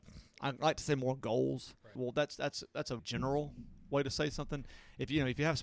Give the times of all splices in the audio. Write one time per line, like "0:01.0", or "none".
0:02.0
0:03.0